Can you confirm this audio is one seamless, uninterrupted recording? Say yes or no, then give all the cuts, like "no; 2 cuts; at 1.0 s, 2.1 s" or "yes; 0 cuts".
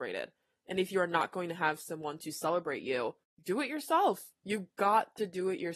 yes; 0 cuts